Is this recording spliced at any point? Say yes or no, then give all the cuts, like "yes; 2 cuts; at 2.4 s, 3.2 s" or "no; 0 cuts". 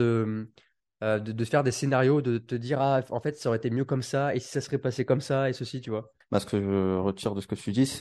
yes; 1 cut; at 6.2 s